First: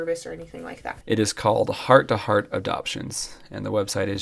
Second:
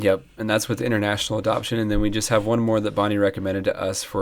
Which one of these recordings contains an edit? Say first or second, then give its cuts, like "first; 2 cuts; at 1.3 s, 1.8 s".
first; 1 cut; at 1.0 s